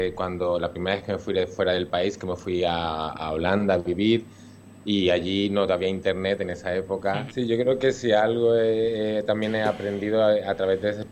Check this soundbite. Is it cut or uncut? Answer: cut